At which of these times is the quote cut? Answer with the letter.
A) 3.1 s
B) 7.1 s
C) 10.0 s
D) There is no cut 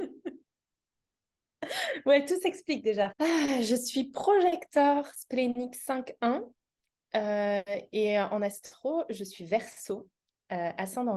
A